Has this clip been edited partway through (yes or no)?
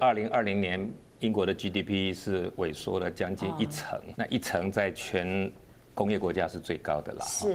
yes